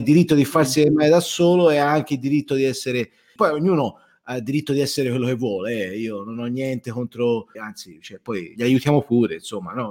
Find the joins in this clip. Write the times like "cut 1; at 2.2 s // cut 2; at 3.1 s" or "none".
cut 1; at 3.4 s // cut 2; at 7.5 s